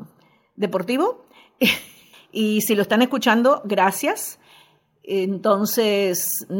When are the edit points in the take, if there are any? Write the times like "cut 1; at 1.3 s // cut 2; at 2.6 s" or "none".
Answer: cut 1; at 2.1 s

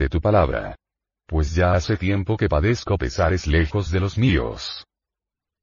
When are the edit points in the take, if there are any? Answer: cut 1; at 1.1 s

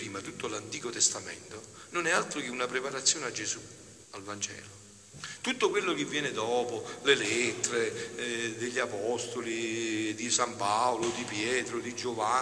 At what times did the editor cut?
cut 1; at 4.0 s

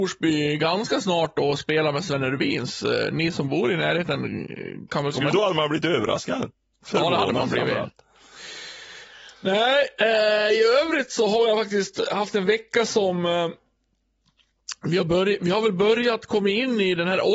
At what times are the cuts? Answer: cut 1; at 5.3 s

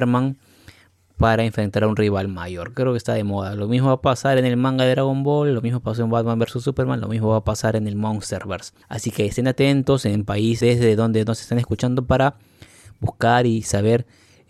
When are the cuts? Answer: cut 1; at 8.8 s // cut 2; at 10.6 s

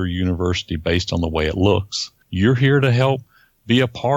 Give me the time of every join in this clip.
cut 1; at 2.2 s

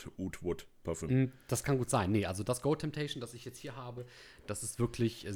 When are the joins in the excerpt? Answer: none

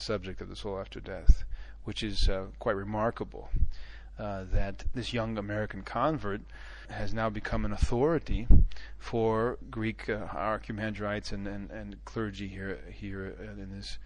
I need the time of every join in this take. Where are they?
none

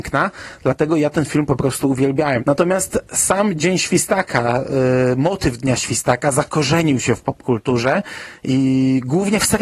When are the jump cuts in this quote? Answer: cut 1; at 2.4 s

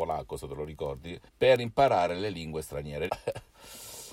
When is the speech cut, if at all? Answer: cut 1; at 1.3 s // cut 2; at 3.1 s

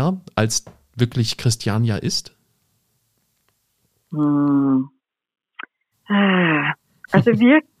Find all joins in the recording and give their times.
cut 1; at 5.9 s

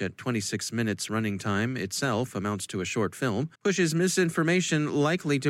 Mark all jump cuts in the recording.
cut 1; at 3.5 s

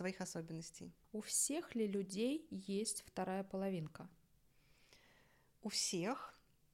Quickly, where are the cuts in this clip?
none

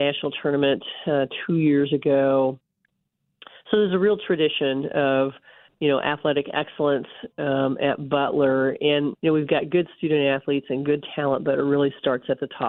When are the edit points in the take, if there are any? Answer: cut 1; at 9.1 s

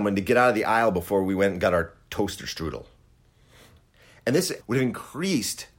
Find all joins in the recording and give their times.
cut 1; at 4.6 s

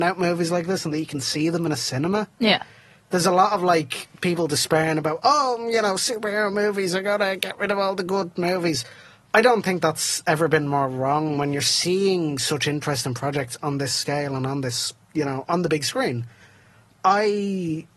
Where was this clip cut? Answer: none

